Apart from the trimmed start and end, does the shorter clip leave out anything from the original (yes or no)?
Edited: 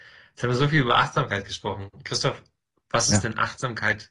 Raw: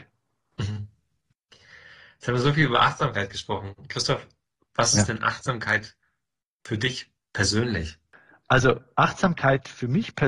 no